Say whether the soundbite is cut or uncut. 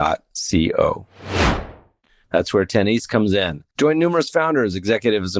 cut